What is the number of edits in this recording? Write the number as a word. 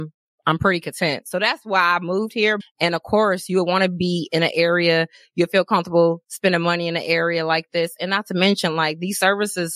one